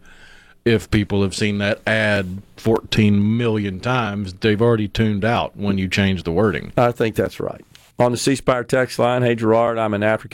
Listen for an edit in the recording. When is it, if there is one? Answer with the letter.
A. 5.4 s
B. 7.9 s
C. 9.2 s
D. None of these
B